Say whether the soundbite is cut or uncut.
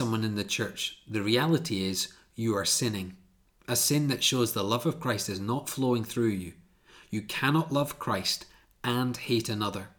uncut